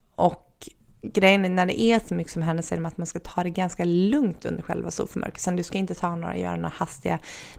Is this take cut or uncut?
uncut